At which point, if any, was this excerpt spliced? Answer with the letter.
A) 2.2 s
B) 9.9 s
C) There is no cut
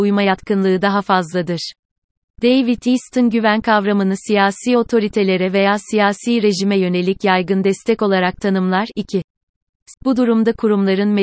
B